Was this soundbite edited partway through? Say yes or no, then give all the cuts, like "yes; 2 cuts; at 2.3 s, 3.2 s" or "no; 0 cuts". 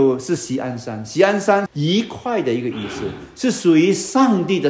yes; 1 cut; at 1.7 s